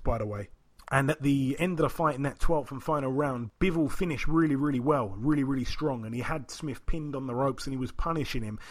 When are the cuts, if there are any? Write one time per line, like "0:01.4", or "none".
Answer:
none